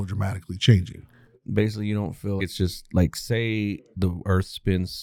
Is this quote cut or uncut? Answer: cut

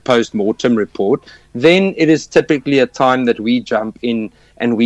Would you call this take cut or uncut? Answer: uncut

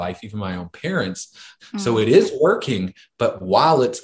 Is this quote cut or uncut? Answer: cut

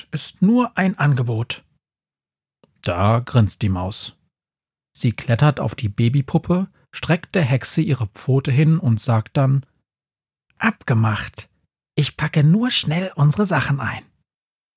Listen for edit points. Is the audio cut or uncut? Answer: uncut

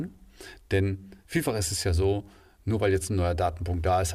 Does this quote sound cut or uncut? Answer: cut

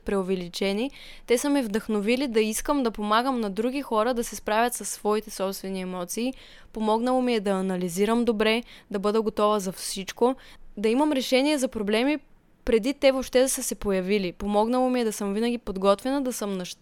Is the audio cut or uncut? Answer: uncut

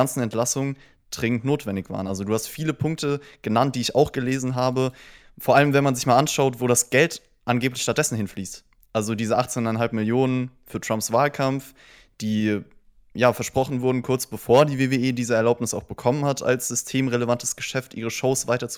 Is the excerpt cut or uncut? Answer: uncut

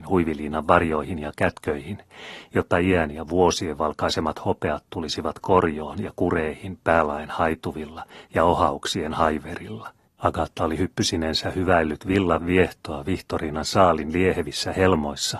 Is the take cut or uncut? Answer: cut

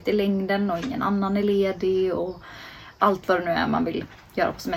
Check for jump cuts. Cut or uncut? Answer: uncut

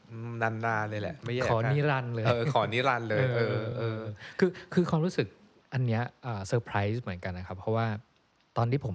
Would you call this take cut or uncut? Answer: uncut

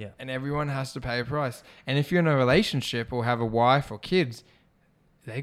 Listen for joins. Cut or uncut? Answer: uncut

